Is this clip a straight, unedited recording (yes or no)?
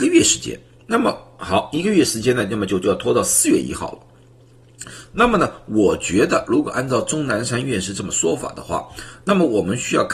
no